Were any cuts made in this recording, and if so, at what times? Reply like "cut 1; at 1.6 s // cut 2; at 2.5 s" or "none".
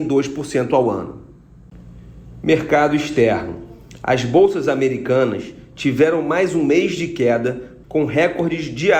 cut 1; at 7.8 s